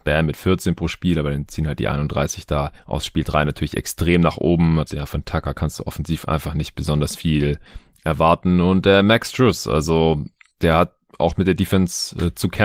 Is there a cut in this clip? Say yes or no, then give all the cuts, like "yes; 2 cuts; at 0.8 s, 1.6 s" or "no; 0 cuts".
yes; 1 cut; at 4.9 s